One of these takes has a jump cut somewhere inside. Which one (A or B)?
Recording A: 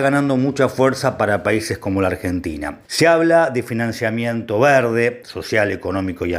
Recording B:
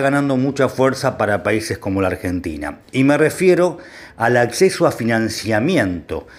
A